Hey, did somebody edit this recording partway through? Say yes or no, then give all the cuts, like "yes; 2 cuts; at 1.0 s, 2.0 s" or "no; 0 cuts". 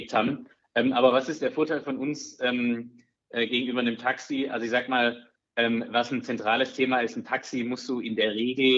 no; 0 cuts